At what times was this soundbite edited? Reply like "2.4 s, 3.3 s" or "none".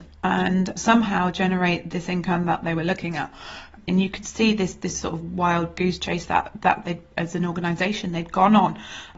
3.9 s